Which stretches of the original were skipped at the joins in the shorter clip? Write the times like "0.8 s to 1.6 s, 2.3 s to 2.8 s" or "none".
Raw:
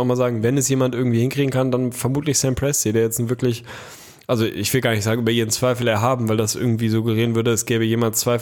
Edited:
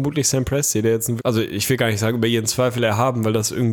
3.3 s to 4.2 s